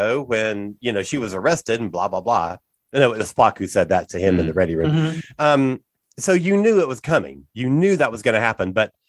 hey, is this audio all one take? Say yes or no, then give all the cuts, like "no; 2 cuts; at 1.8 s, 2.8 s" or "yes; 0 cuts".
yes; 0 cuts